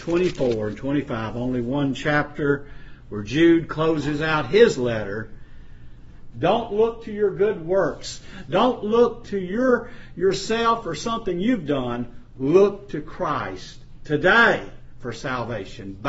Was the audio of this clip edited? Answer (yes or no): yes